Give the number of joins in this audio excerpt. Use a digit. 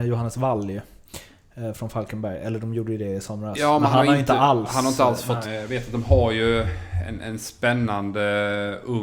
1